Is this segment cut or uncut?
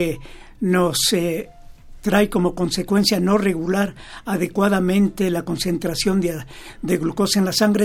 uncut